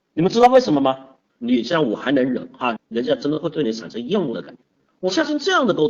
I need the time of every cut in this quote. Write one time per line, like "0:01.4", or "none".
0:01.3
0:02.8